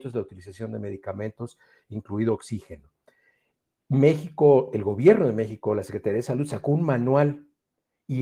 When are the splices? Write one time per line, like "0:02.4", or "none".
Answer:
none

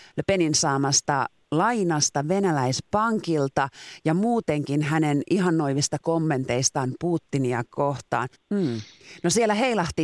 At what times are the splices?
0:08.3

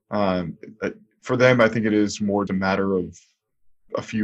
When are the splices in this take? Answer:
0:02.5

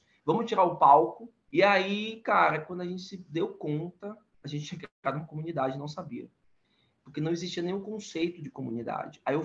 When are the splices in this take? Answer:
0:01.5

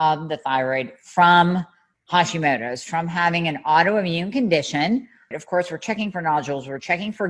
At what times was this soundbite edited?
0:02.9
0:05.3

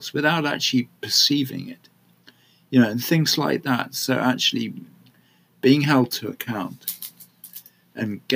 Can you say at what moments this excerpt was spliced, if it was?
none

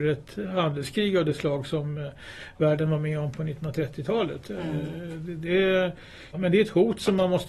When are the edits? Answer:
0:06.3

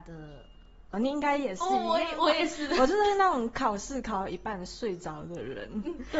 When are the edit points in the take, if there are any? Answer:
0:00.9

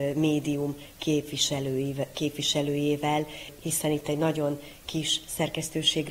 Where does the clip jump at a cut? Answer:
0:03.6

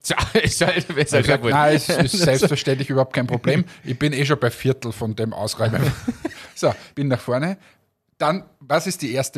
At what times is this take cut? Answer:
0:06.9

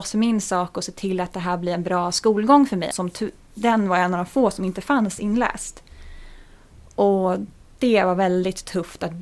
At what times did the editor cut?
0:02.9

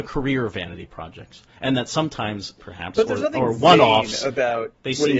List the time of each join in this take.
0:02.6

